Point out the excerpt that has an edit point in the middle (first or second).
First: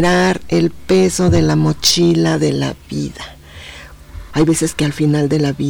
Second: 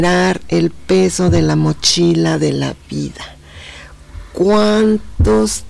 first